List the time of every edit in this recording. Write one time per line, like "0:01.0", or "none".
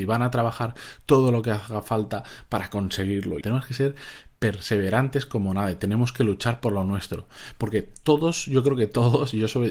0:03.4